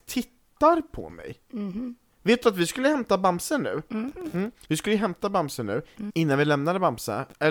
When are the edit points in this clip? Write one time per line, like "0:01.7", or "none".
0:04.7
0:06.1